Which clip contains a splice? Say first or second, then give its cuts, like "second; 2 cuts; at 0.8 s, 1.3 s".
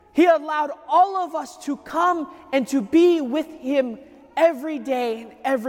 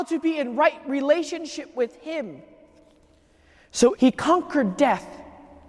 second; 1 cut; at 3.9 s